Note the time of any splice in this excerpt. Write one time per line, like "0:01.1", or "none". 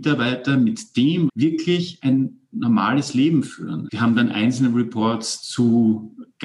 0:01.3
0:03.9